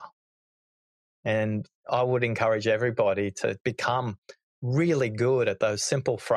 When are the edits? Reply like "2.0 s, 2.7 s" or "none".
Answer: 1.1 s, 3.6 s